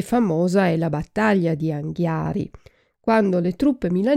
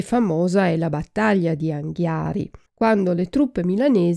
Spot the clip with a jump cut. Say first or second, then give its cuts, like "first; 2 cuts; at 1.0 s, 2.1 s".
second; 1 cut; at 2.7 s